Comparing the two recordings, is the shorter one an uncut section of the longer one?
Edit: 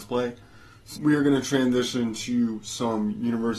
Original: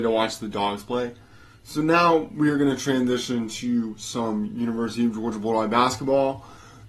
no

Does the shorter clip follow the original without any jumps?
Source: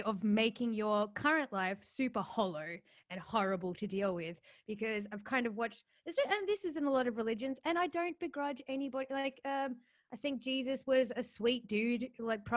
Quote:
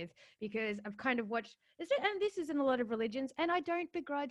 yes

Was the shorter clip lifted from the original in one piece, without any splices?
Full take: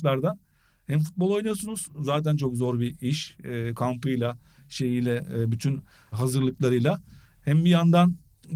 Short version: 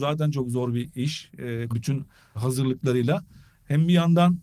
no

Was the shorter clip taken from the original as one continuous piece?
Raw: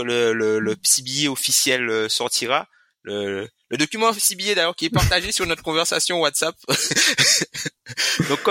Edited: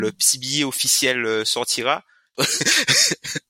no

